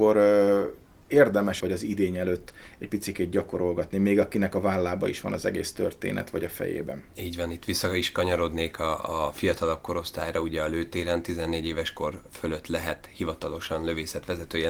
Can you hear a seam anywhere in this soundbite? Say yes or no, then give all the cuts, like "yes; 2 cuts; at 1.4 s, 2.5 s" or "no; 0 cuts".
yes; 1 cut; at 1.6 s